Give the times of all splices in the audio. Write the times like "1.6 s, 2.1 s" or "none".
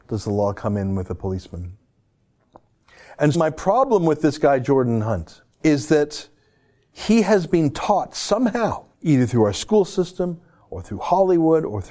3.3 s, 5.5 s, 8.9 s